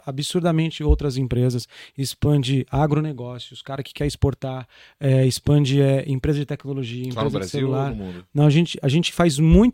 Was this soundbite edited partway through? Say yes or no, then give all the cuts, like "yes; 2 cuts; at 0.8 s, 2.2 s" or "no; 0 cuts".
no; 0 cuts